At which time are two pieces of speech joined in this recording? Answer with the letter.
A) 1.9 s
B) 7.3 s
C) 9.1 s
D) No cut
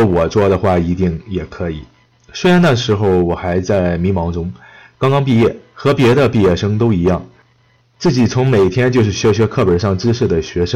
D